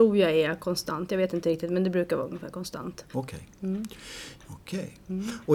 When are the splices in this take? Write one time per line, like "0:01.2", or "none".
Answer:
0:03.1
0:04.4